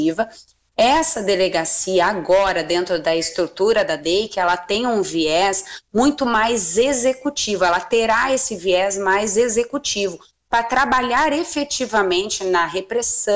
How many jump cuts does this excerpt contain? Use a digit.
0